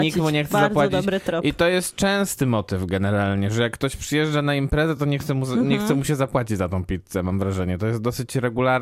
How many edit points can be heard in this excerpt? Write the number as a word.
zero